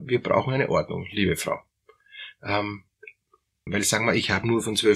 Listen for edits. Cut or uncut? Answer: cut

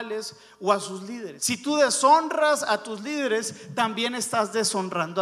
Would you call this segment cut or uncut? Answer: cut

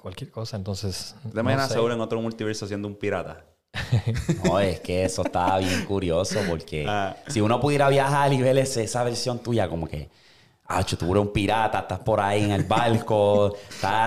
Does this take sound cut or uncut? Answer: uncut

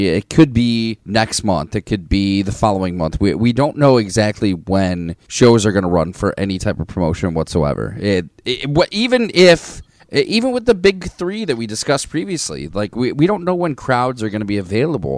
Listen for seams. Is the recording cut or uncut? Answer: uncut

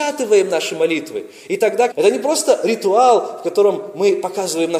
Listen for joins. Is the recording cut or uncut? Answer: cut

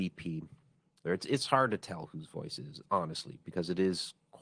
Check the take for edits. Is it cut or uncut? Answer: cut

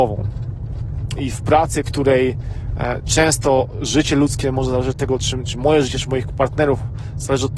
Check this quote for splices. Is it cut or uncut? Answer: cut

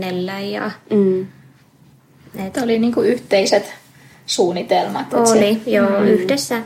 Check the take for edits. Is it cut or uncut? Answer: uncut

